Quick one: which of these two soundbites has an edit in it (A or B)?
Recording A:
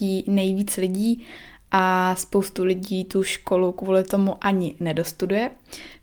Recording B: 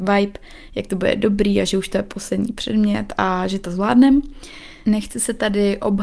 B